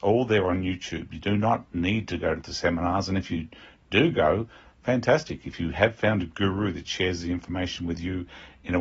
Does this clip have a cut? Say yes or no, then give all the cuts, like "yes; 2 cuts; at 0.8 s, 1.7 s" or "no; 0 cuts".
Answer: no; 0 cuts